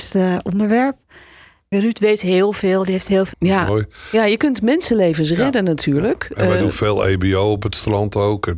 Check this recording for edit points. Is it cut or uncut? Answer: cut